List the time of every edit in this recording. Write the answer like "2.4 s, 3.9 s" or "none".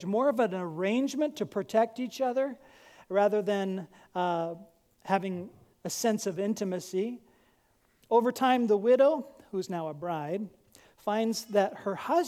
5.7 s, 8.0 s